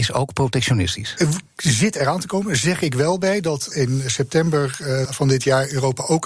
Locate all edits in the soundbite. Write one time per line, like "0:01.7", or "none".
0:03.7
0:05.1